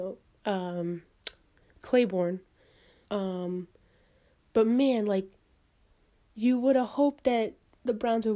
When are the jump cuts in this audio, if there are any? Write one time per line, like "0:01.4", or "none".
0:03.0